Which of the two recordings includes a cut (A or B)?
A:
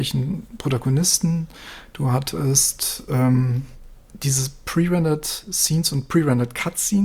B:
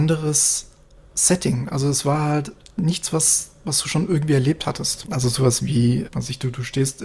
B